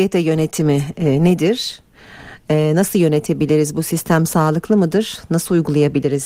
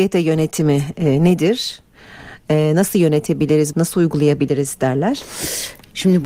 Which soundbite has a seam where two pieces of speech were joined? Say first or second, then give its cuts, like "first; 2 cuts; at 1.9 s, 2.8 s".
second; 1 cut; at 3.7 s